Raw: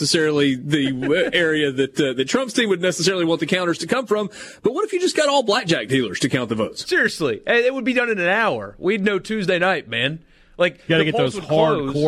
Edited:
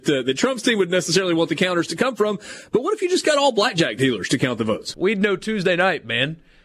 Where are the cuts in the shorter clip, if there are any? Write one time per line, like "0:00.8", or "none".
0:04.9